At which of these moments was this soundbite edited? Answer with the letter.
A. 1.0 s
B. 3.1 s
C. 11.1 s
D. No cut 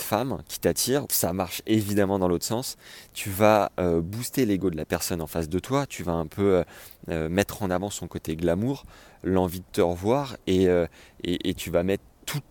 A